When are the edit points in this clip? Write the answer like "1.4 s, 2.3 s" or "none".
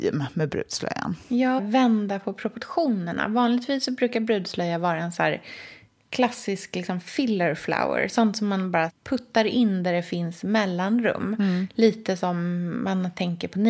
1.6 s